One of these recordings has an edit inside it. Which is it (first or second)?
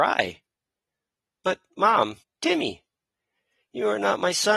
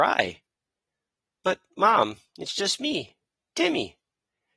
first